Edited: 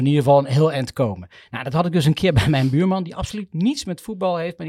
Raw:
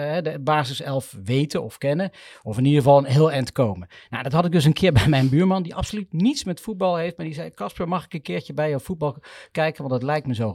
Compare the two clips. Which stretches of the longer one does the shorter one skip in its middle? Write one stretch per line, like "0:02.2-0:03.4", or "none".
none